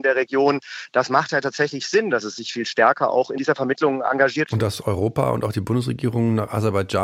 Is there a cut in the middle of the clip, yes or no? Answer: yes